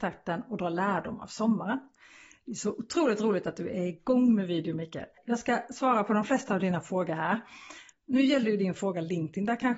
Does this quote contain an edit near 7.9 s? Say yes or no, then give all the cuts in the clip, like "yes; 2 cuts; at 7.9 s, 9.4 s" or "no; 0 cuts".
yes; 1 cut; at 7.9 s